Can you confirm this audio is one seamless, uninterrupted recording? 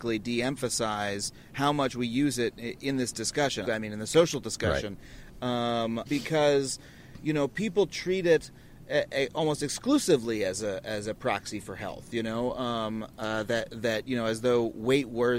no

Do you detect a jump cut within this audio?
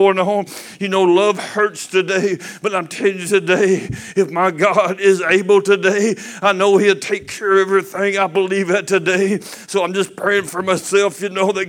no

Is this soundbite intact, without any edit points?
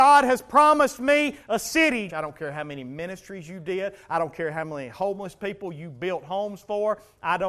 no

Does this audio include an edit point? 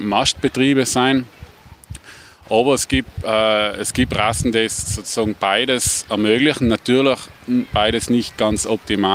no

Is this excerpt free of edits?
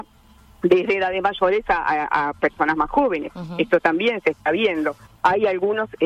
no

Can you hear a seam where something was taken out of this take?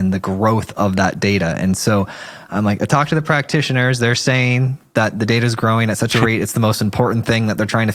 no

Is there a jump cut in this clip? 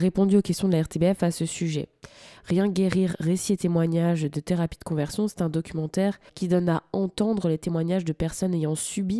yes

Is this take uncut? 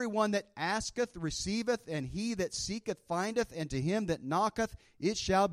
yes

